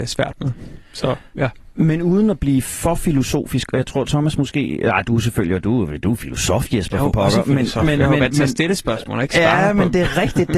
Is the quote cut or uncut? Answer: uncut